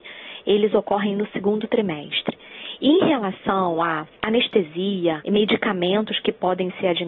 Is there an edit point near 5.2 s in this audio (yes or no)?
yes